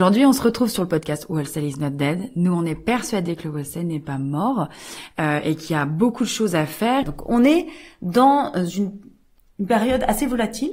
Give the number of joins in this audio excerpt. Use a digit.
1